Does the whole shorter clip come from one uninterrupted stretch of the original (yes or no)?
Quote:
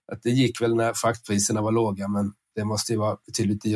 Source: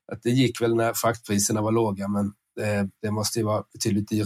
no